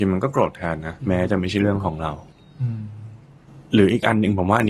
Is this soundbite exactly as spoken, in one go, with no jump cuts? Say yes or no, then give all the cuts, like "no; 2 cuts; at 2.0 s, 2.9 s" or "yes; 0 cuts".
no; 1 cut; at 1.0 s